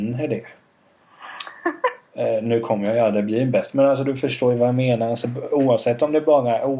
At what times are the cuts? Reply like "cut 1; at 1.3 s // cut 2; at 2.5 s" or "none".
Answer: none